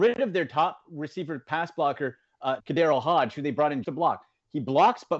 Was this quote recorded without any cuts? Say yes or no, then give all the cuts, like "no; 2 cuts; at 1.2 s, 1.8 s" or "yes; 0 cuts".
no; 2 cuts; at 2.6 s, 3.8 s